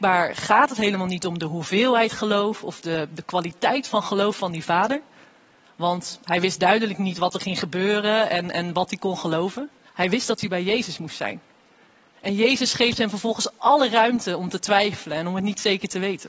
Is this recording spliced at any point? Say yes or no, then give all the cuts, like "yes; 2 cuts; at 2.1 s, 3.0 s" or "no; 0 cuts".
yes; 1 cut; at 9.9 s